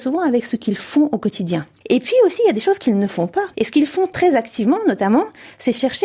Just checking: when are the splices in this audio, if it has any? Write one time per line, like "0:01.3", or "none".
0:01.8
0:03.5